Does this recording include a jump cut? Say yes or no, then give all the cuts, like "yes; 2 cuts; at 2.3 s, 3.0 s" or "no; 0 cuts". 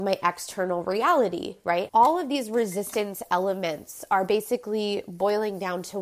yes; 1 cut; at 1.9 s